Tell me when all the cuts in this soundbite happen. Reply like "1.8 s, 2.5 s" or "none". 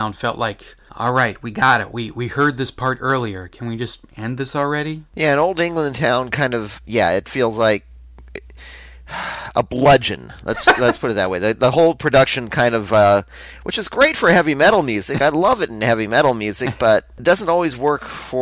none